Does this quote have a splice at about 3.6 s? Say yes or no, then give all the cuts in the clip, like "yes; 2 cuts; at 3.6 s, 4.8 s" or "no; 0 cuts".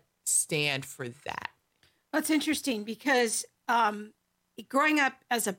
no; 0 cuts